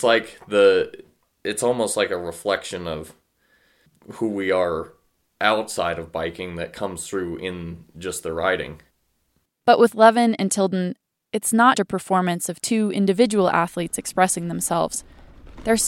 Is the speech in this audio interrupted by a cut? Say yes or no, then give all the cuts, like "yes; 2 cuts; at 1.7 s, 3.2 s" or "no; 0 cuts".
yes; 2 cuts; at 9.5 s, 11.7 s